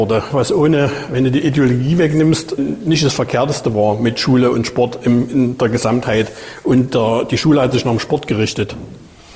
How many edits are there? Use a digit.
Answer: 1